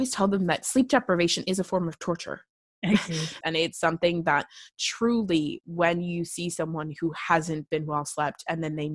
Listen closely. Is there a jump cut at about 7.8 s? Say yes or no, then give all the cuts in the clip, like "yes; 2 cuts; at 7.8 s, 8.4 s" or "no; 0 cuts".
no; 1 cut; at 3.4 s